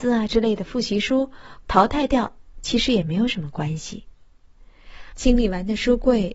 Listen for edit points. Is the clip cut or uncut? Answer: cut